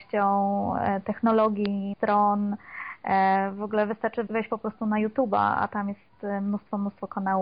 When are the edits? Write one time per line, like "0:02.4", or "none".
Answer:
0:01.9
0:04.3